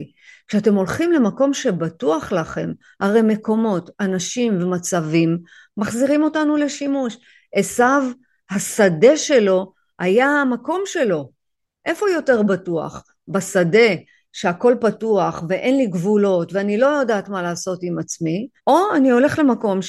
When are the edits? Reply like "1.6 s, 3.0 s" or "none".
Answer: 11.8 s, 18.6 s